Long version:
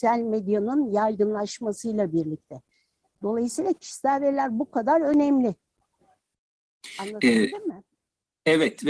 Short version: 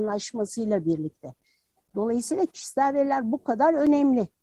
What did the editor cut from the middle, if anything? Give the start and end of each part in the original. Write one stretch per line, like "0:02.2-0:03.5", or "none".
none